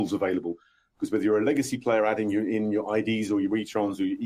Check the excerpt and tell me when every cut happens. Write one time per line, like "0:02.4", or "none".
none